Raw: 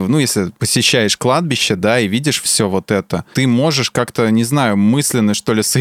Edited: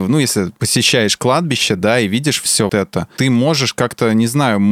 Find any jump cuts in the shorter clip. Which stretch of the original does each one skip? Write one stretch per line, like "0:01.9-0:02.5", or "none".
0:02.7-0:02.9